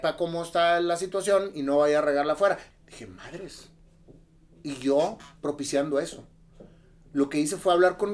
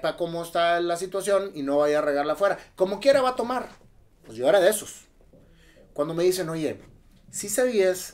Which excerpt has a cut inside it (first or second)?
first